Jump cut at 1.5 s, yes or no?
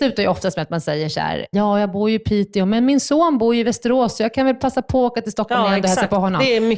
yes